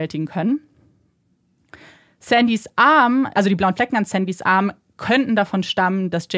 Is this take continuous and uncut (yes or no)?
no